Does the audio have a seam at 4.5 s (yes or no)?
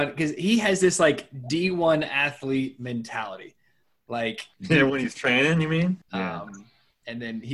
yes